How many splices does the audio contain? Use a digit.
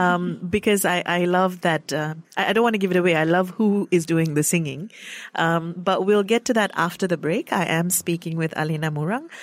0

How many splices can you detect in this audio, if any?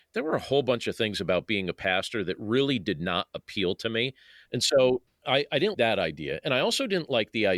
2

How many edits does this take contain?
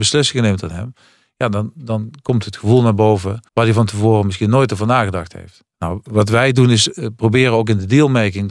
1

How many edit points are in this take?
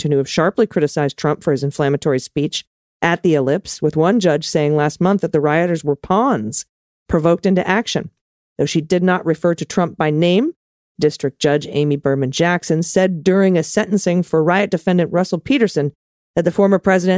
1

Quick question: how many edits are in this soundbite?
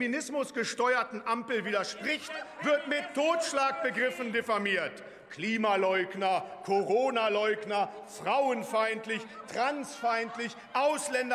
0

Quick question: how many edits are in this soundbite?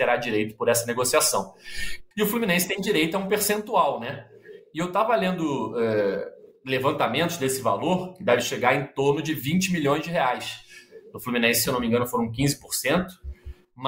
2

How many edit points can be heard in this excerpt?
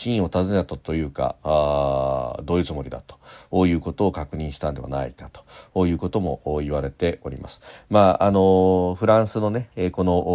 0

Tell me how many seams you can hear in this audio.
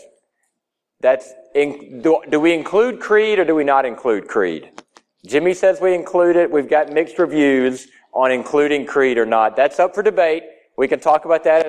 0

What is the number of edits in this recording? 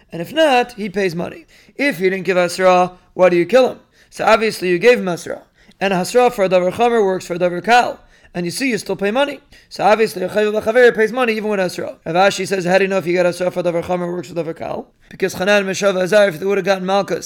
2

